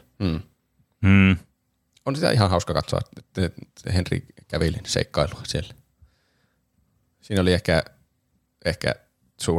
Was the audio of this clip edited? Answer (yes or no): no